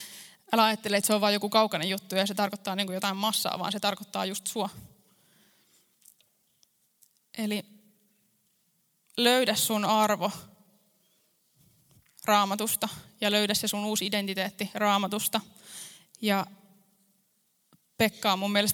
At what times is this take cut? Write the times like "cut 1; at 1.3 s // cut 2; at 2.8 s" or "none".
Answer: none